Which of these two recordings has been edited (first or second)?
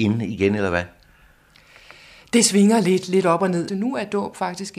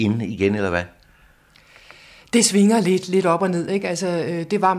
first